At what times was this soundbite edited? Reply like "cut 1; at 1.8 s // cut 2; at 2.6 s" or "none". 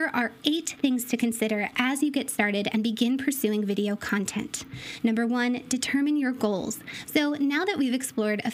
cut 1; at 7.0 s

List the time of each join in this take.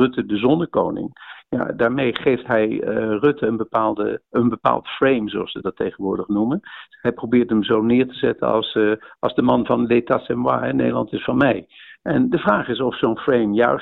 none

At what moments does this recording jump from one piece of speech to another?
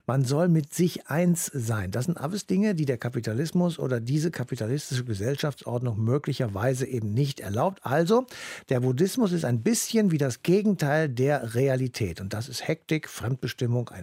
none

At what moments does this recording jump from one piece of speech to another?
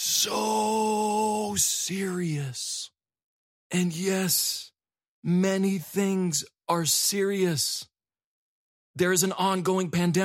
none

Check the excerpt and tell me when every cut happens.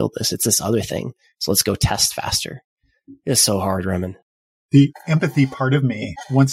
none

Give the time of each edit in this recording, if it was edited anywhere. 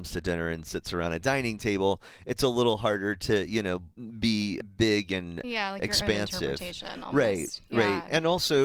none

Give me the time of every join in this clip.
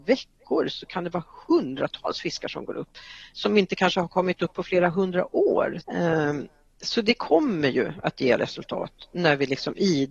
cut 1; at 5.8 s

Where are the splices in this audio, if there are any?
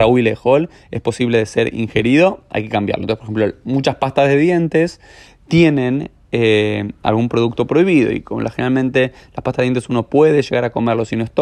none

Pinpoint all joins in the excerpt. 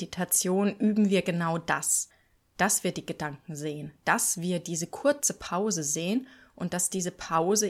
none

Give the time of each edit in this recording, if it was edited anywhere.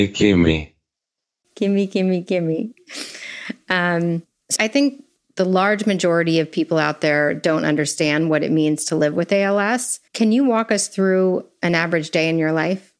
cut 1; at 4.6 s // cut 2; at 10.1 s

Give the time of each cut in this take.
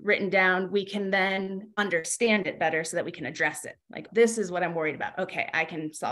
cut 1; at 4.1 s

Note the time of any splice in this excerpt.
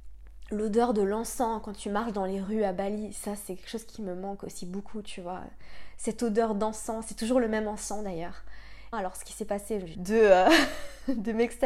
cut 1; at 8.9 s // cut 2; at 9.9 s

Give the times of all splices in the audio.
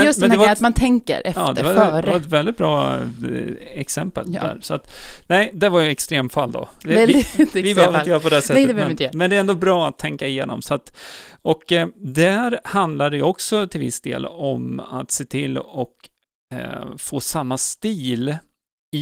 none

